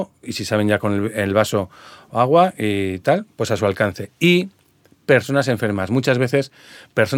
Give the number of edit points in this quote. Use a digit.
0